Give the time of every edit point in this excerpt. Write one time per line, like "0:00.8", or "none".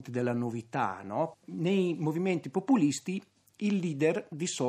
0:01.3

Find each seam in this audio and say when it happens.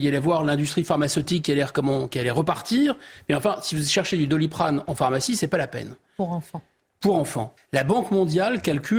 0:07.6

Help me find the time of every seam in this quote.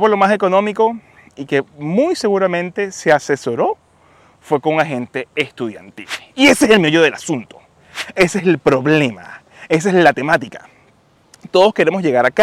none

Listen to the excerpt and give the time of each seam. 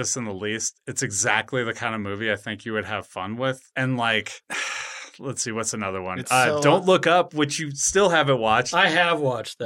none

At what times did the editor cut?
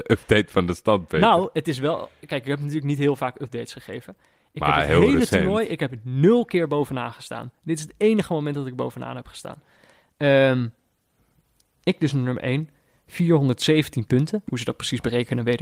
none

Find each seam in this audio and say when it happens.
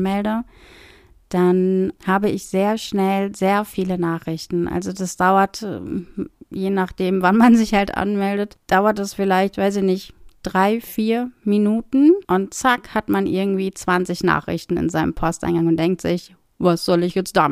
0:12.2
0:16.4

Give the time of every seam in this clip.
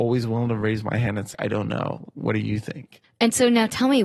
0:01.3

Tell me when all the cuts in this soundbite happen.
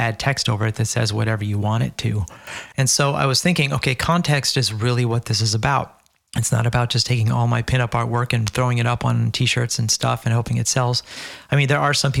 0:02.7

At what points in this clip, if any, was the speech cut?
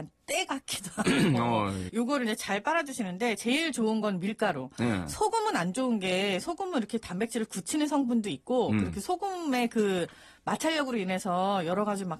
0:01.9

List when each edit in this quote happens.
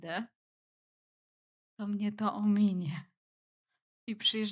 none

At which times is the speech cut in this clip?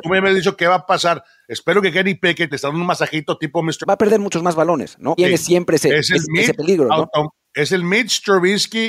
0:02.5
0:03.8
0:05.2

